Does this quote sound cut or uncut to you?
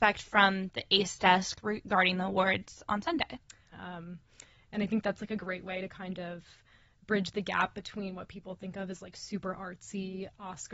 cut